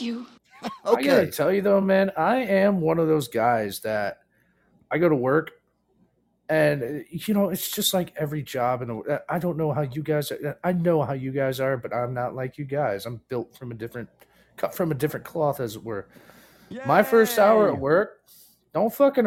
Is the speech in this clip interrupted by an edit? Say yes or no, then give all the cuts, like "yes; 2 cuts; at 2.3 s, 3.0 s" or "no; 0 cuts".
no; 0 cuts